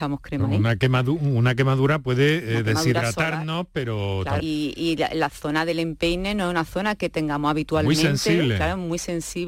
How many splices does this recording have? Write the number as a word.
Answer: one